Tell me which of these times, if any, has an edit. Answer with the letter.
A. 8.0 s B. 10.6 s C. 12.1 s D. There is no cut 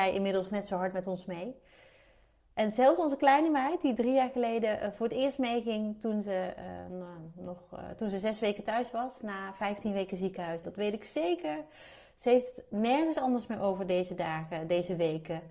B